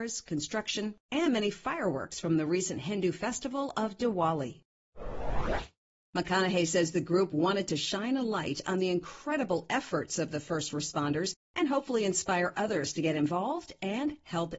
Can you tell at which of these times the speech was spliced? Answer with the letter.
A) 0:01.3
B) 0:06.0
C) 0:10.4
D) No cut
B